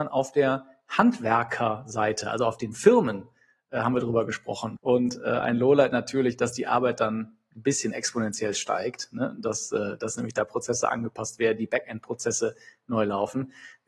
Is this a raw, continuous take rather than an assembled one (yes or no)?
no